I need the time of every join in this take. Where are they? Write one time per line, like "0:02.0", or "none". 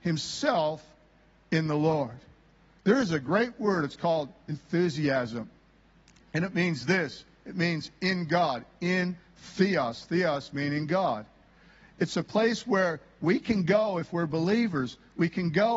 none